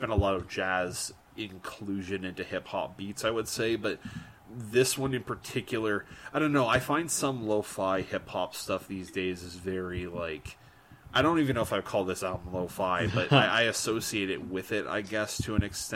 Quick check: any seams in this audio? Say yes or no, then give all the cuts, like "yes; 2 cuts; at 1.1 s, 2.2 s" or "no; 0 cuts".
no; 0 cuts